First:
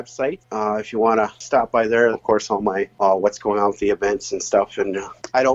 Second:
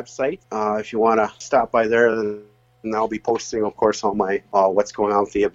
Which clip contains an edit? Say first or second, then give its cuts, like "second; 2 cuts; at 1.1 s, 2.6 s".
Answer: first; 1 cut; at 2.1 s